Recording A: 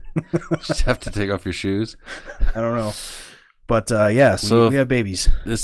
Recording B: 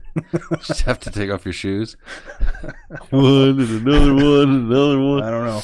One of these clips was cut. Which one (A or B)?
A